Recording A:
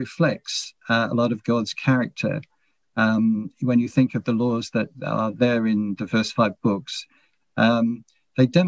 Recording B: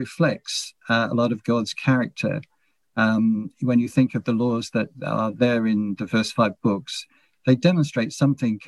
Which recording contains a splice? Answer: B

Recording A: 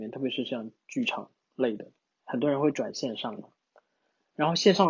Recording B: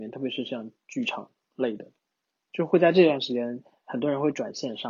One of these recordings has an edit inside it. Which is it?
A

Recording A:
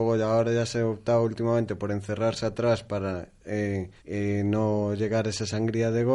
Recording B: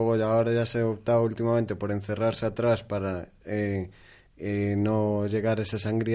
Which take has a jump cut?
A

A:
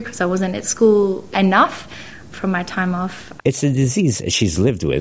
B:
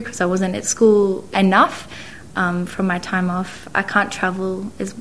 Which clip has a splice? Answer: A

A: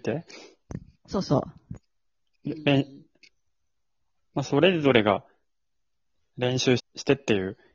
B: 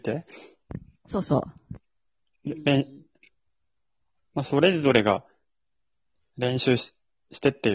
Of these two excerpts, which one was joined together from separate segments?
A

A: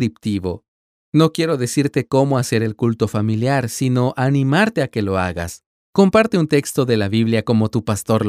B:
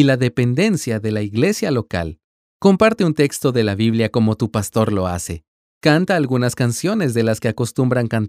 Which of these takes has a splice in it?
A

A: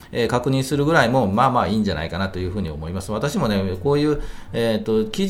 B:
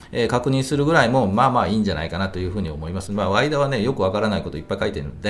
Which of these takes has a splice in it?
B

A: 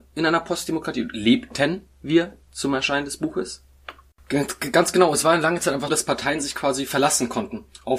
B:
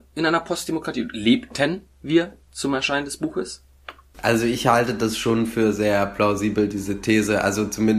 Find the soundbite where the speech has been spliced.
A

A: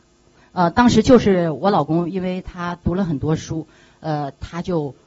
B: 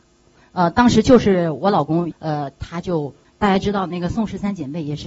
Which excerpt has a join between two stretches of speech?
B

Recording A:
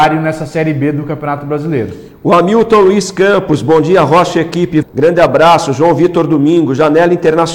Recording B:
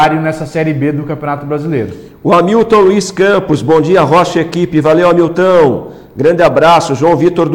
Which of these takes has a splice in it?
A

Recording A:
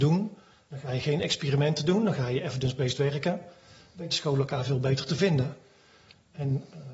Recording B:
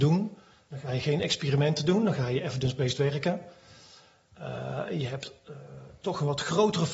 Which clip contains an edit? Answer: A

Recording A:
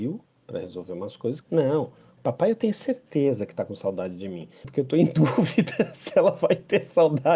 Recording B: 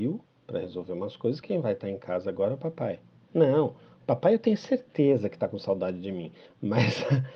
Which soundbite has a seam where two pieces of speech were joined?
A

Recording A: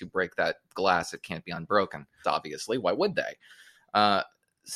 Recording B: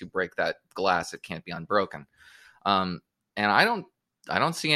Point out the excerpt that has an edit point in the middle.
A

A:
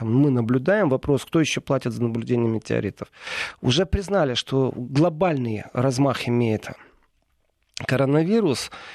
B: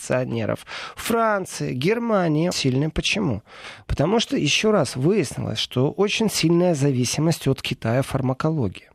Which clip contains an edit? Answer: B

